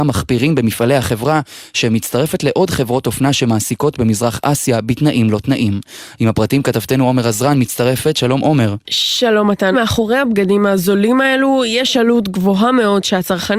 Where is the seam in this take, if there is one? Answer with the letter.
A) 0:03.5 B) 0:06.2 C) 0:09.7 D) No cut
C